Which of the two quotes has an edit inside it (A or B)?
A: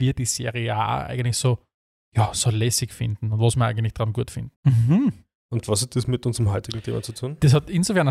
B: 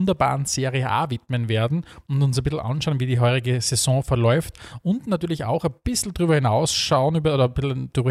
A